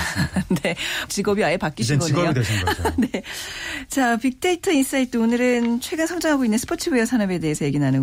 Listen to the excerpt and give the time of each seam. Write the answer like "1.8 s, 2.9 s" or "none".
1.1 s